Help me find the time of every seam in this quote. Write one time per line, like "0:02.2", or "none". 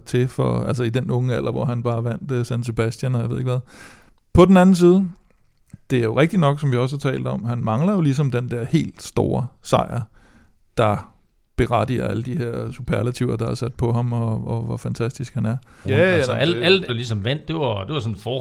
0:15.8
0:16.9